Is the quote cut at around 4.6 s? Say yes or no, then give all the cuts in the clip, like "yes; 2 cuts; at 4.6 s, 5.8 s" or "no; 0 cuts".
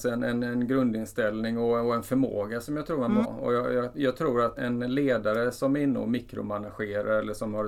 yes; 2 cuts; at 3.2 s, 4.6 s